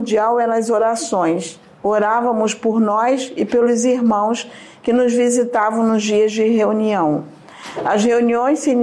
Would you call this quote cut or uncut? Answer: uncut